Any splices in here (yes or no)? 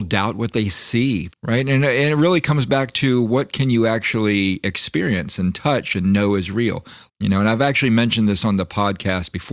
yes